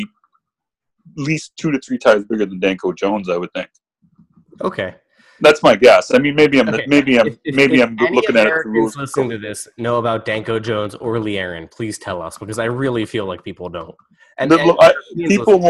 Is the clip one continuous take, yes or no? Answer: yes